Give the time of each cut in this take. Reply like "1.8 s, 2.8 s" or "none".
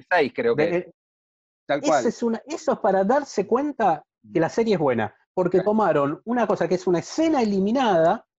none